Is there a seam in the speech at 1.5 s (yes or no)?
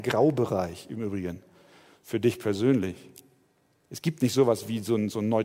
no